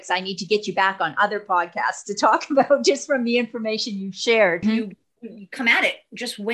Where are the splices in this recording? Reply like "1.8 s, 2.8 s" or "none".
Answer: 4.6 s